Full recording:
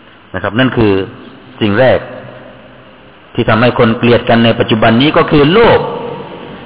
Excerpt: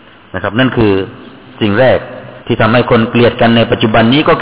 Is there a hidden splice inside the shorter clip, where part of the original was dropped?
yes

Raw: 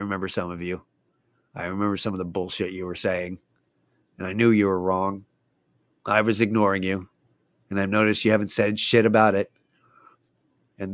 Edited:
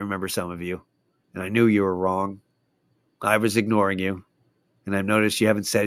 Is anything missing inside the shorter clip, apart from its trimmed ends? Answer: yes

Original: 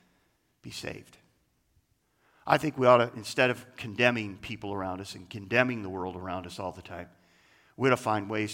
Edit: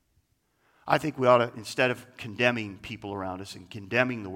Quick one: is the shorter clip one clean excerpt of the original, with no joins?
yes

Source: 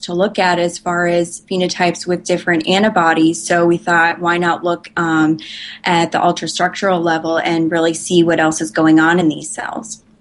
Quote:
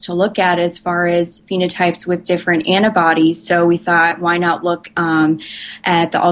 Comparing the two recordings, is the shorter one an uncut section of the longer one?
yes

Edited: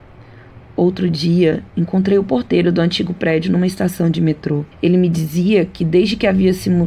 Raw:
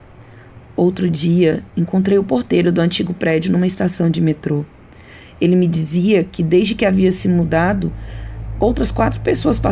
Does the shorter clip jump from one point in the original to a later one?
yes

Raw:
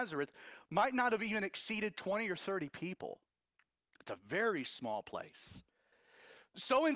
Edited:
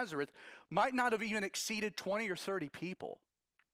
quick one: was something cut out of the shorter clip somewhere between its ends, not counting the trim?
no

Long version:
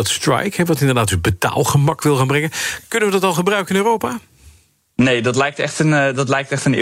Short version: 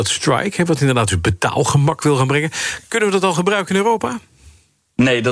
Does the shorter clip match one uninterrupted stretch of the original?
yes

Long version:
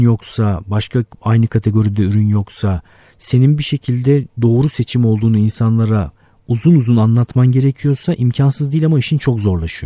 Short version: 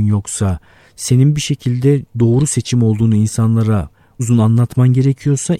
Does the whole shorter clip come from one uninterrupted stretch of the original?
no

